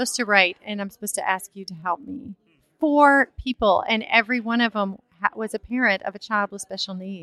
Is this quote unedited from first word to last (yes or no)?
yes